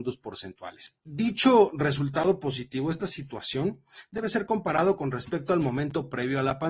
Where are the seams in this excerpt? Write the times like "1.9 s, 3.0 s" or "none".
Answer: 1.0 s